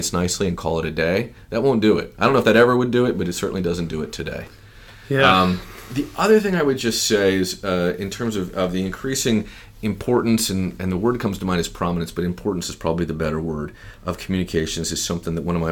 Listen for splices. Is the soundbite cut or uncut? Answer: uncut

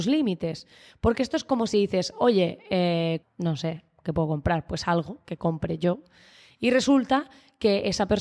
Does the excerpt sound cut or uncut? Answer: cut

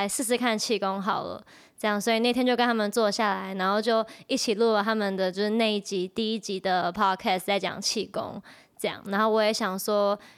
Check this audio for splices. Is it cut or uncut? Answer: uncut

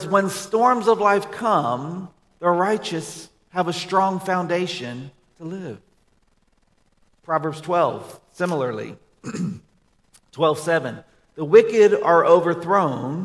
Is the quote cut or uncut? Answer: uncut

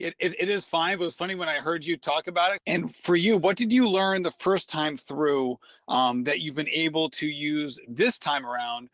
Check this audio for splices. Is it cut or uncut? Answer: cut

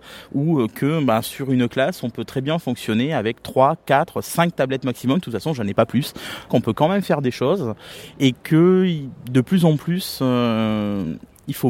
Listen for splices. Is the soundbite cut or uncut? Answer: cut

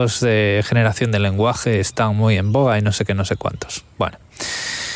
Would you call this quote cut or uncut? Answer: uncut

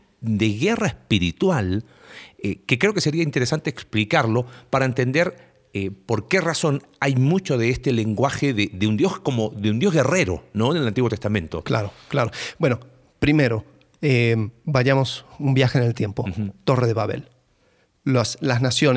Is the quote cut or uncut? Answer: uncut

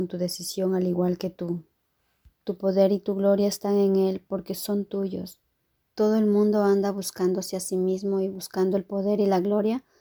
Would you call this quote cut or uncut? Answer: cut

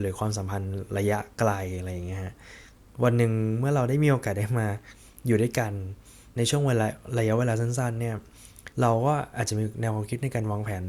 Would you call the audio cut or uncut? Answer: cut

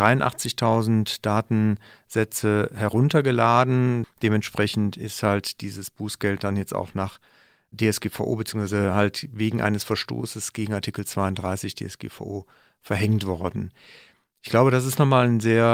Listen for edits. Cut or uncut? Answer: cut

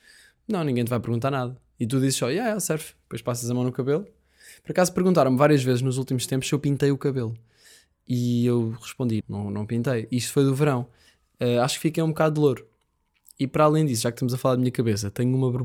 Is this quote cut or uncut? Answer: cut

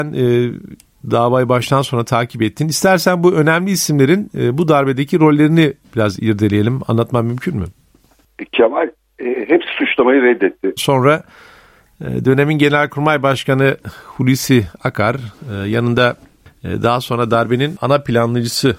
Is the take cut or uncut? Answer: cut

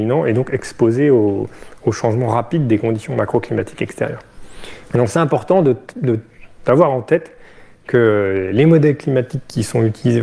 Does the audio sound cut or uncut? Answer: cut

